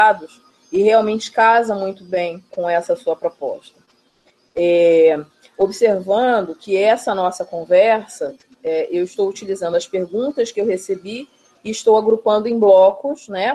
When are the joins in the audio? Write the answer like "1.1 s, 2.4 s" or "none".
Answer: 2.5 s